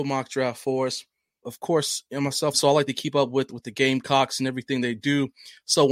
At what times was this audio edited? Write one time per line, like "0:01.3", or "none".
0:01.4
0:02.5

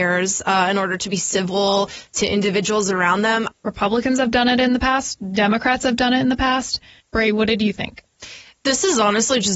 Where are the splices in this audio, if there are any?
0:03.5
0:07.0

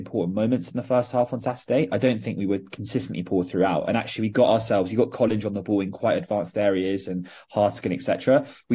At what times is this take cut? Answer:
none

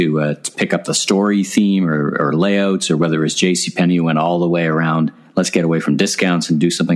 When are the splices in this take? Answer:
none

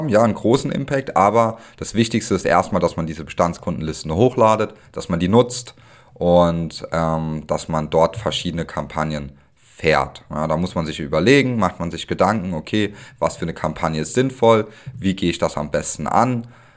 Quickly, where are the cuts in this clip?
none

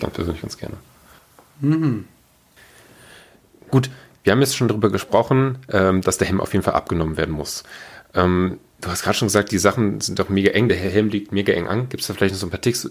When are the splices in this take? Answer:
none

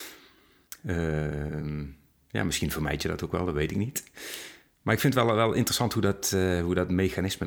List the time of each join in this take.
none

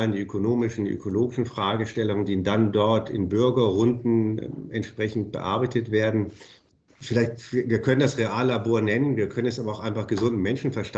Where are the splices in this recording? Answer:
none

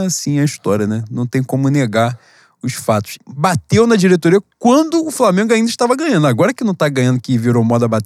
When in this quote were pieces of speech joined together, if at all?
0:03.2

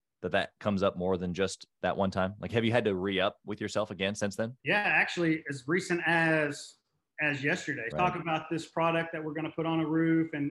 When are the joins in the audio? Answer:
0:04.6
0:07.9

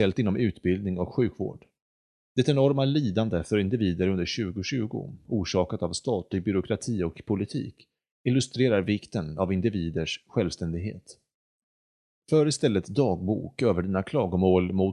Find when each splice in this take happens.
0:12.1

